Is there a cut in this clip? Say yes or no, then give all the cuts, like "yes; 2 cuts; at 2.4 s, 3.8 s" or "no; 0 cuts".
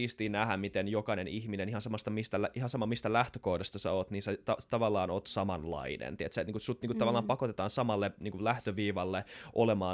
no; 0 cuts